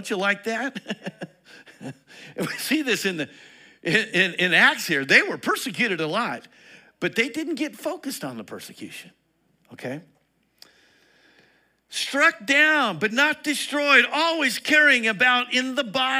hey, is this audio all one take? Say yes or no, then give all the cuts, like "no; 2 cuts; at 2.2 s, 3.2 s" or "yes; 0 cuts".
yes; 0 cuts